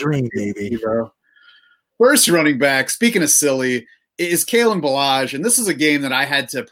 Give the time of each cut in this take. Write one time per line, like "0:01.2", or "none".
0:01.9